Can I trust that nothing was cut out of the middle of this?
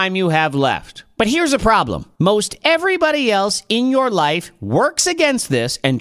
yes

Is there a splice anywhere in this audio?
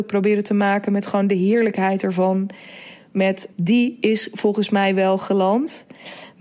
yes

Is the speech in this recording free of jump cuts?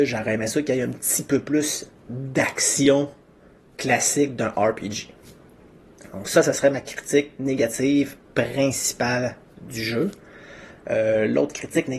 yes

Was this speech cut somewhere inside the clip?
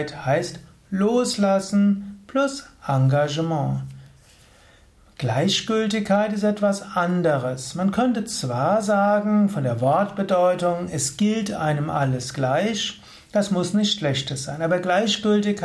no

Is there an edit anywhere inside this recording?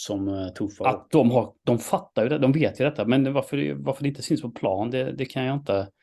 no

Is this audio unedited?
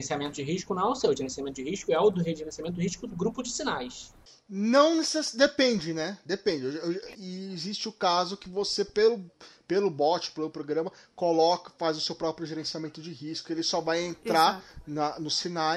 no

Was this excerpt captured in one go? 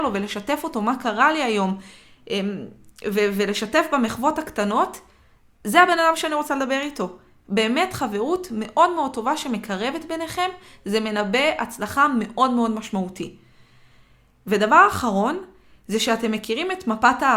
yes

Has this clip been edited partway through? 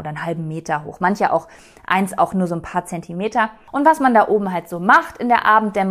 no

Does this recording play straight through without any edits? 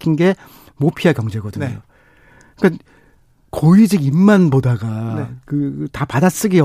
yes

